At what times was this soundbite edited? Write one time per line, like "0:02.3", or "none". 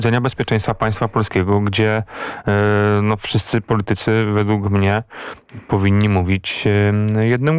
none